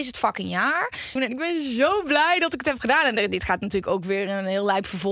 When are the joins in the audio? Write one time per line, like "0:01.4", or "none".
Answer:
0:01.2